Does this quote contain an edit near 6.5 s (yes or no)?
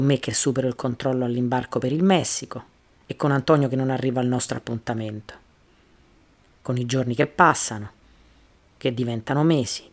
no